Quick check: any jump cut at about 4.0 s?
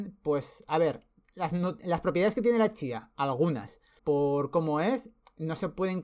yes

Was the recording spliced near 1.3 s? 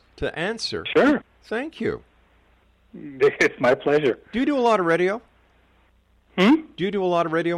no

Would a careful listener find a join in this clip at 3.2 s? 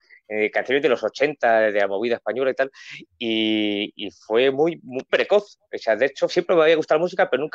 no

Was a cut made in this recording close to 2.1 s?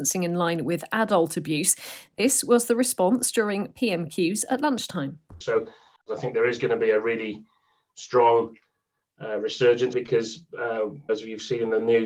no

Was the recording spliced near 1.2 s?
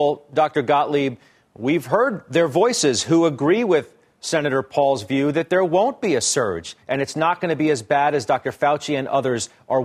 no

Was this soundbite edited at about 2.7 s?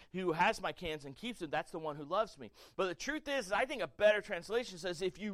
yes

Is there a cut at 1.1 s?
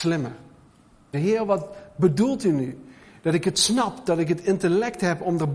yes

